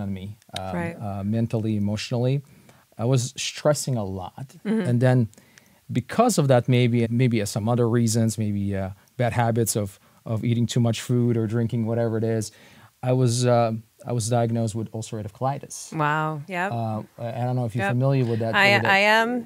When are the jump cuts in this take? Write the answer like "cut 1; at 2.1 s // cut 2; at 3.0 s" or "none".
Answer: cut 1; at 7.0 s